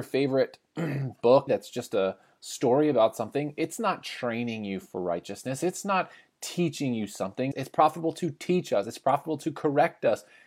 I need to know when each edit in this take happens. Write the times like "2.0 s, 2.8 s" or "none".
1.5 s, 7.5 s